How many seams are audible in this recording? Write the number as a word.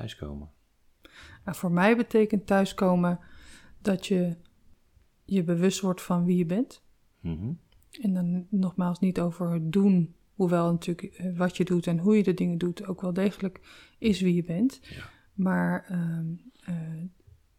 zero